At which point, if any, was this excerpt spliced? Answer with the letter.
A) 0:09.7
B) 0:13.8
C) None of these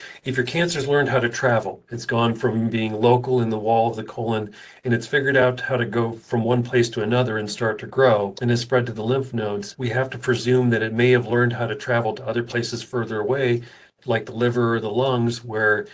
A